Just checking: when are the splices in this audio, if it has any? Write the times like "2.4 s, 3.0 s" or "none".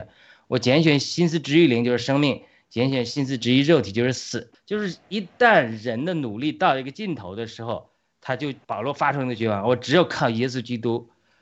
4.5 s, 8.6 s